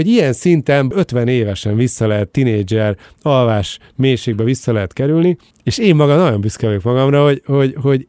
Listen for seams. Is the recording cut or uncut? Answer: cut